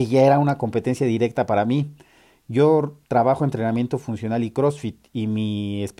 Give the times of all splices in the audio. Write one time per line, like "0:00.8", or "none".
none